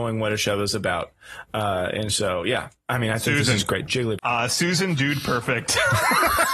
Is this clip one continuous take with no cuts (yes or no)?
no